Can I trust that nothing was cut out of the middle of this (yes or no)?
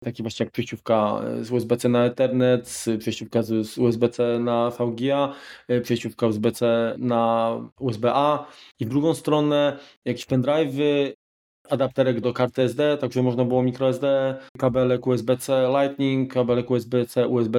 no